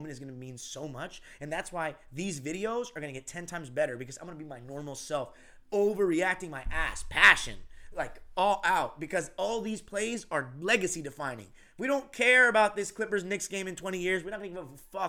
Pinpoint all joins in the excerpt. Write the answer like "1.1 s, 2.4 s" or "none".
none